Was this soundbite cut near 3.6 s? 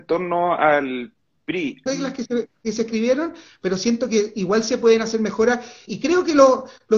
no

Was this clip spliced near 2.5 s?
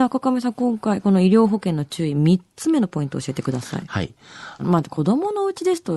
no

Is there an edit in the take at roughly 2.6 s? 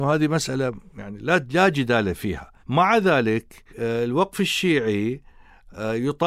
yes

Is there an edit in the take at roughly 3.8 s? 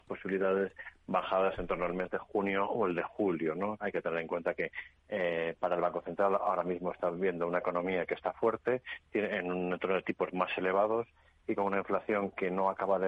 yes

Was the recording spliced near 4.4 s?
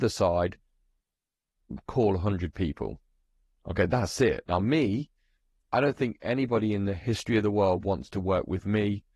yes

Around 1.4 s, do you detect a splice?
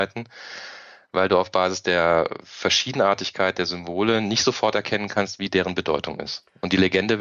no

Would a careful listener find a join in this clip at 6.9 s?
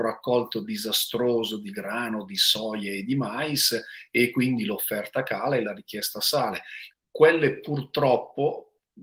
yes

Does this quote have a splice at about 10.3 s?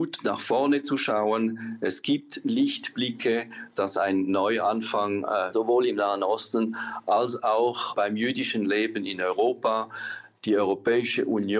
no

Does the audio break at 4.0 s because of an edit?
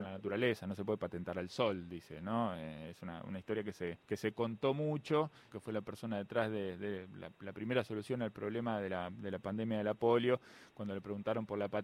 yes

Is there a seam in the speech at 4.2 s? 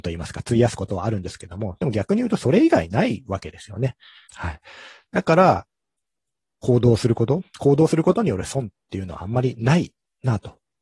yes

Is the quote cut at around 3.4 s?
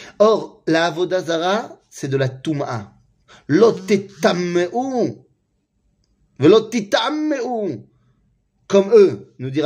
no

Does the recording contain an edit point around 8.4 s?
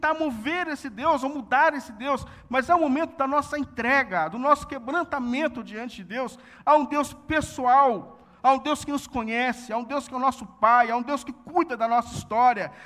no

